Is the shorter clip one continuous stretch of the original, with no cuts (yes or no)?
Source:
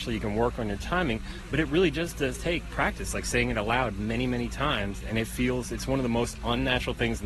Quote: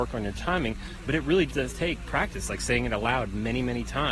no